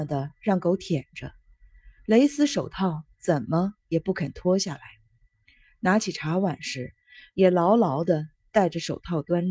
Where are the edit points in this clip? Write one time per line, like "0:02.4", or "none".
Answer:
none